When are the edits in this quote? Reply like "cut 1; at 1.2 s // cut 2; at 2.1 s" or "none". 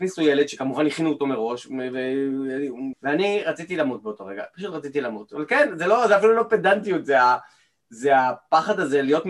cut 1; at 2.9 s